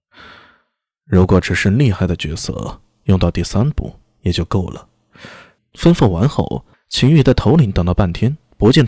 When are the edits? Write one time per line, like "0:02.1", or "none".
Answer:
0:05.6
0:06.7